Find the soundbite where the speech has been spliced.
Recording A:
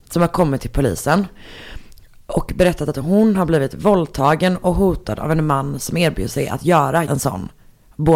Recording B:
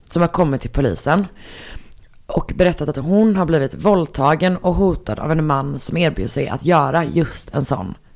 A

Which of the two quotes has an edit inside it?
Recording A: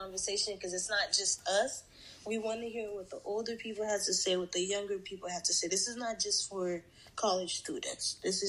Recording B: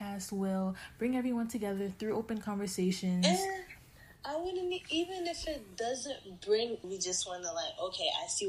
B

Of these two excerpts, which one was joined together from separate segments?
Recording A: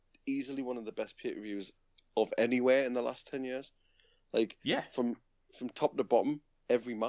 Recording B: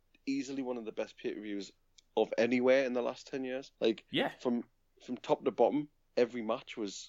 B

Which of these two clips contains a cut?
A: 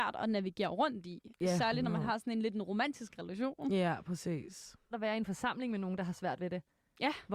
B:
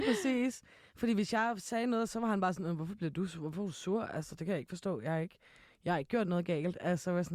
A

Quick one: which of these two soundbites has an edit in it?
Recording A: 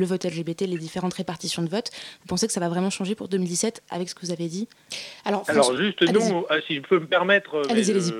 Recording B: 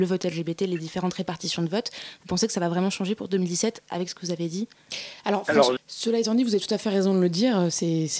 B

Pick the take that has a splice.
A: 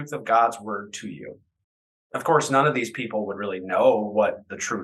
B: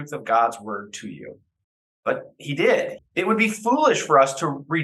B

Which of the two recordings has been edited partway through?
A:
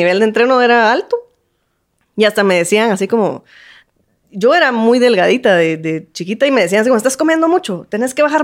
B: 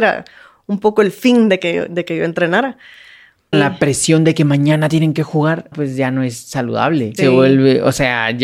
B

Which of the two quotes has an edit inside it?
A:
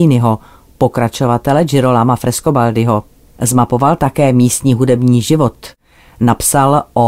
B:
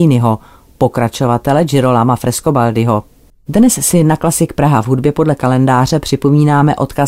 B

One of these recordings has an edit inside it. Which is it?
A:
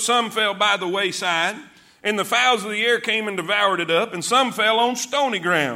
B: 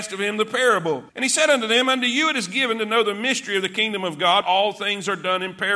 B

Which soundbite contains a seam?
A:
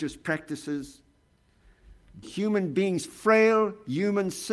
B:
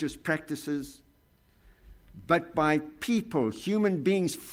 A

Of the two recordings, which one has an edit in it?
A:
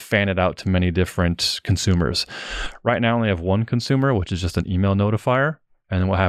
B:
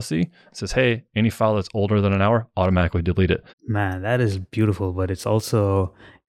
B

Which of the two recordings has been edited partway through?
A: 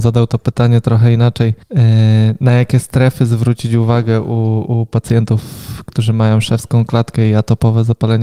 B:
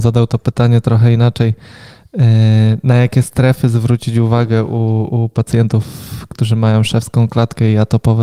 A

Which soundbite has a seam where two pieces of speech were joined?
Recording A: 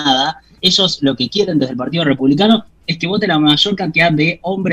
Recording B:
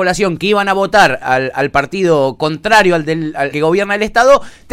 B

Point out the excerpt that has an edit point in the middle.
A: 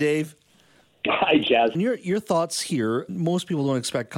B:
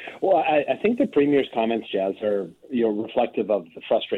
A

